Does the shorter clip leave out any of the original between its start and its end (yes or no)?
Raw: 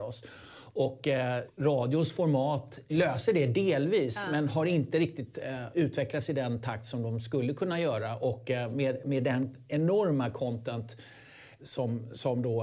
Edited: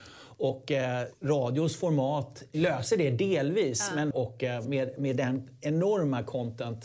yes